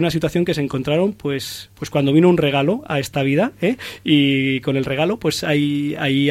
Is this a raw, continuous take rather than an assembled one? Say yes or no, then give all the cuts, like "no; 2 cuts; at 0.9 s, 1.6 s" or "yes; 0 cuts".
yes; 0 cuts